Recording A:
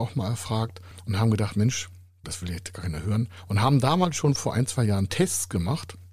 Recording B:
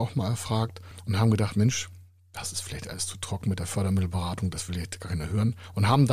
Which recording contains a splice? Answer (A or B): A